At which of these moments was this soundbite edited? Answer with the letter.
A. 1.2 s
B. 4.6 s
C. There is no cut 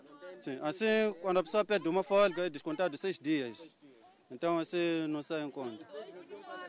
C